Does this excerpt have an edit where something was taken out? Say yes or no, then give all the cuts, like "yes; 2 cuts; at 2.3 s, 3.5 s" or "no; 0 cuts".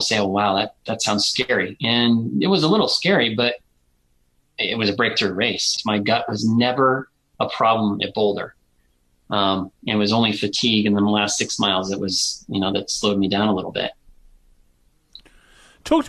yes; 1 cut; at 5.8 s